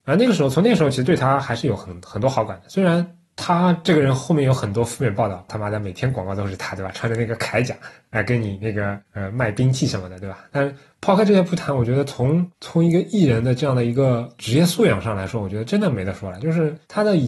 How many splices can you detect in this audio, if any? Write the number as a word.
one